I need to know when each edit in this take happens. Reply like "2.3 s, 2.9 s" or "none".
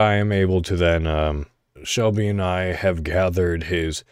1.8 s